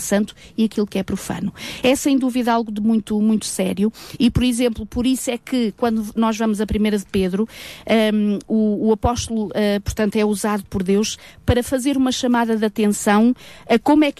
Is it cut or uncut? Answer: uncut